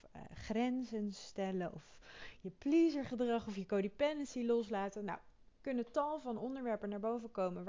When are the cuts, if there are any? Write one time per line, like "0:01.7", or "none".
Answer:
none